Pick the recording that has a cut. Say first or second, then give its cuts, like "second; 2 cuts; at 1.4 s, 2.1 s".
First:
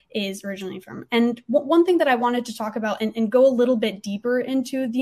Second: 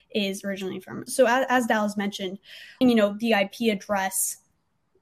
second; 2 cuts; at 1.1 s, 2.8 s